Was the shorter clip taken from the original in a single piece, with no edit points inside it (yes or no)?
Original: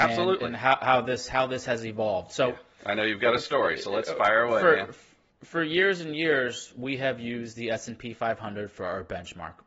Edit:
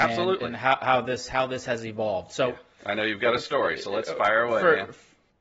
yes